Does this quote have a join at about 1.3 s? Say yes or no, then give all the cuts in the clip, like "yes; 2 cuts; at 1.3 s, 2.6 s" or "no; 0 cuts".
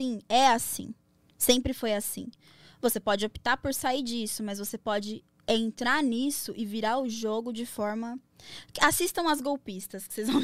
no; 0 cuts